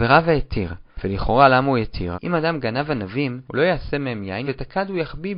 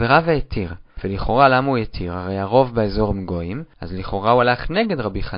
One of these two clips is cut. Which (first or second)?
first